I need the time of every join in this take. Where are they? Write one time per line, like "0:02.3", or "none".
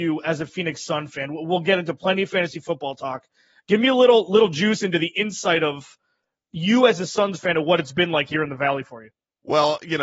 none